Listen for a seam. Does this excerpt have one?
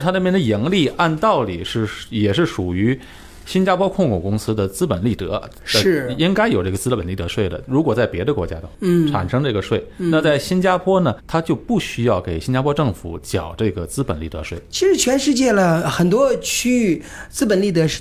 yes; 1 cut; at 11.2 s

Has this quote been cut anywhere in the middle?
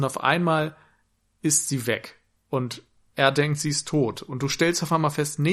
no; 0 cuts

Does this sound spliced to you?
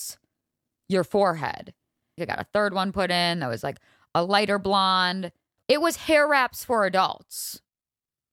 yes; 2 cuts; at 2.2 s, 5.6 s

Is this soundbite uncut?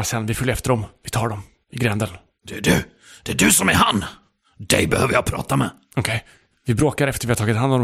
yes; 0 cuts

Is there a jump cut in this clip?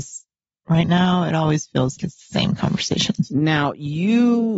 yes; 1 cut; at 2.0 s

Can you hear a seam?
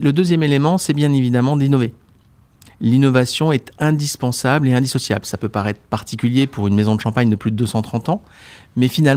no; 0 cuts

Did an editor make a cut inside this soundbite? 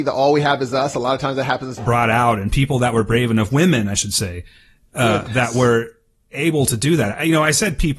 yes; 1 cut; at 1.8 s

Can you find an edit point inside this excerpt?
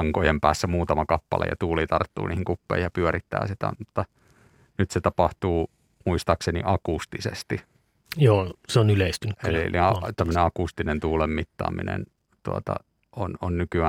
no; 0 cuts

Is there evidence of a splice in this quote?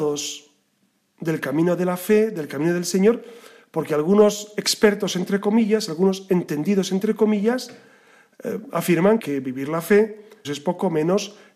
yes; 2 cuts; at 9.2 s, 10.4 s

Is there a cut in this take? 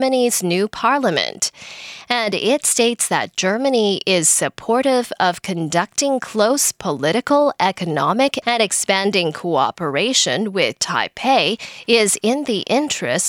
yes; 1 cut; at 8.4 s

